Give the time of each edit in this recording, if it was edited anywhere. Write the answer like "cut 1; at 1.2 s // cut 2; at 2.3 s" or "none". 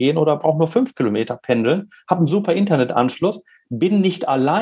none